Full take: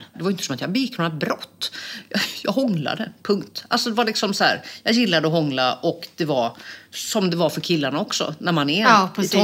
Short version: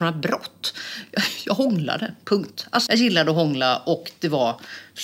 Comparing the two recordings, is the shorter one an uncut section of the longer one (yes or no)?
no